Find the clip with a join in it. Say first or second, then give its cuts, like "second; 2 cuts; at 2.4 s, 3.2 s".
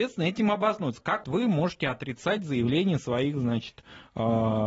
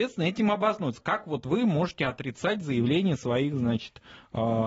first; 1 cut; at 1.2 s